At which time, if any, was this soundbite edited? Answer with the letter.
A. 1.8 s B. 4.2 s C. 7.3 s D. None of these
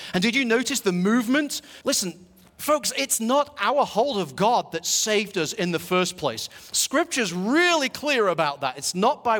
A